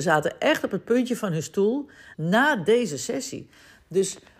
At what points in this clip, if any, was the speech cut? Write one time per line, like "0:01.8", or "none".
0:02.1